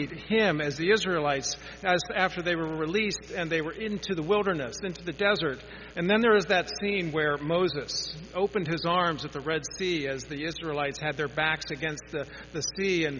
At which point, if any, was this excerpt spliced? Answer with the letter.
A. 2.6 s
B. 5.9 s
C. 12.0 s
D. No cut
B